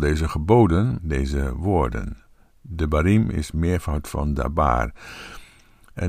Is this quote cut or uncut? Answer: cut